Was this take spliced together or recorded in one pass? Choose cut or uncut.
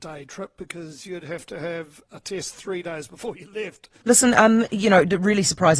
cut